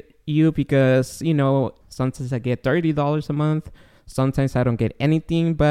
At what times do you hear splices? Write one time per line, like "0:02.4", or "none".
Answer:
0:01.8

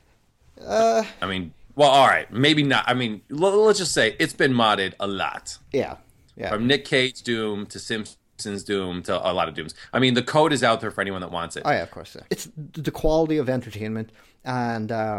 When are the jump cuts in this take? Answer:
0:12.3

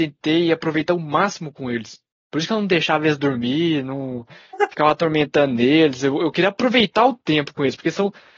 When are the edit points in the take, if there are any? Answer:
none

